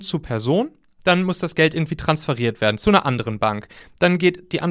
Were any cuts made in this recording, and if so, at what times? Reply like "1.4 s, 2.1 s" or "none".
1.0 s